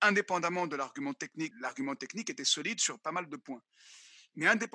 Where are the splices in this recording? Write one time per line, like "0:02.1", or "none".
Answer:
0:01.5